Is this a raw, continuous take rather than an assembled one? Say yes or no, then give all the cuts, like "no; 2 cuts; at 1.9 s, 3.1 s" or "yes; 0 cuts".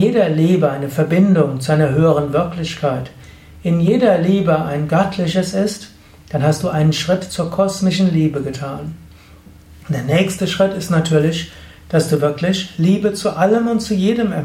yes; 0 cuts